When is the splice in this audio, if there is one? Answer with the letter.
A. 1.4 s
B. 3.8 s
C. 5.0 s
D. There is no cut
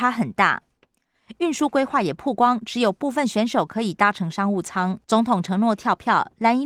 C